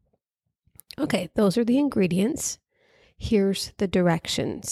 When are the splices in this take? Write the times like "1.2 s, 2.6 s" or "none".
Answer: none